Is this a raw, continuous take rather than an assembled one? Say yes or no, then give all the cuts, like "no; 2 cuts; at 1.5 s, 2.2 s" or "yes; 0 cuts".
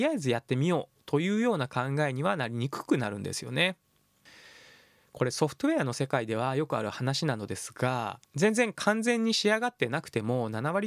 no; 1 cut; at 8.2 s